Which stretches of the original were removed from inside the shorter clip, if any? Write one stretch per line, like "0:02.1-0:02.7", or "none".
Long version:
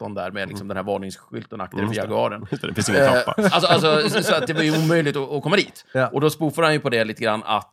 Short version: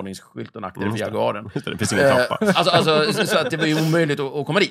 none